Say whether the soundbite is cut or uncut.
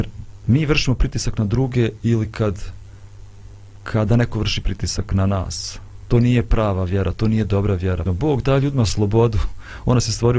cut